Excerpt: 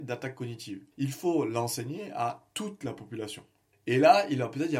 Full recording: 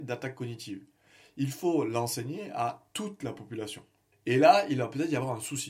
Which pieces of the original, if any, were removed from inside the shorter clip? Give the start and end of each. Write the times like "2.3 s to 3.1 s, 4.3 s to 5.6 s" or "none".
0.9 s to 1.3 s